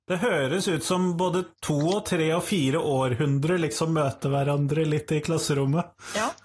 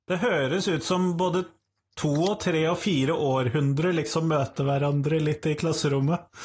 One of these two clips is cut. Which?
first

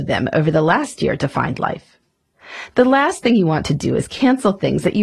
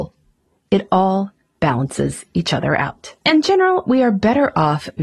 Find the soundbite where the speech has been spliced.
second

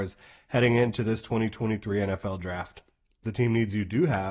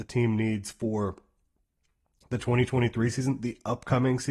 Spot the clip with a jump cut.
first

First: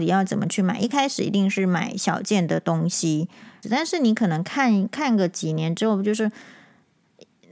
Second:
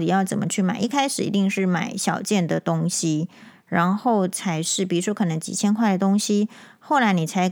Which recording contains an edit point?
first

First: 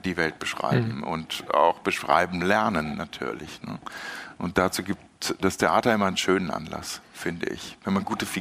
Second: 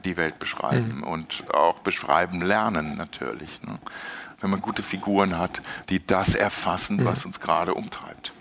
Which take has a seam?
second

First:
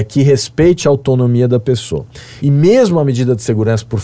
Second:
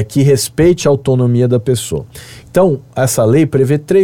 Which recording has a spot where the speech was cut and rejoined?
first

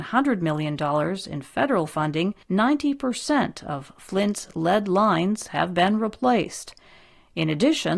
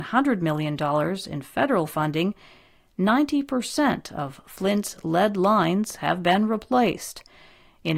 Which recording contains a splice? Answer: first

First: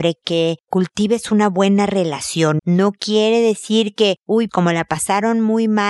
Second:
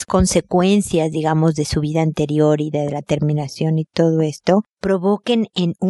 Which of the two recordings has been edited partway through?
first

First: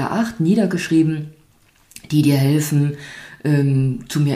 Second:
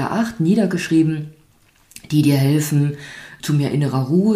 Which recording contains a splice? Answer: second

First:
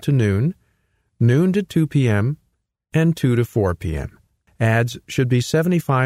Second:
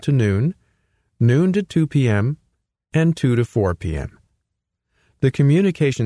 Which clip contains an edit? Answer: first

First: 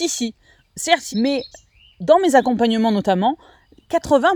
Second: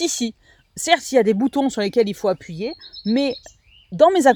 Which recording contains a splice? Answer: first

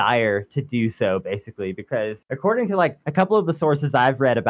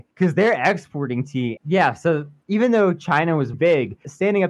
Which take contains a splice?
second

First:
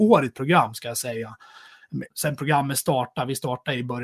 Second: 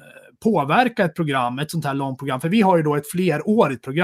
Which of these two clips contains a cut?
first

